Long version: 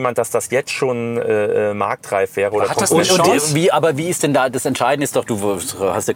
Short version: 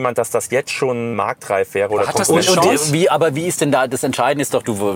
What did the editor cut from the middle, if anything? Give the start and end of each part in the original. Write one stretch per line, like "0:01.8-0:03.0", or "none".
0:01.1-0:01.7